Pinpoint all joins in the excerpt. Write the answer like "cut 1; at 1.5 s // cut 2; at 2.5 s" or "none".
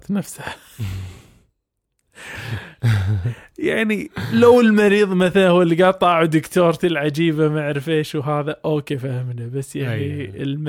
none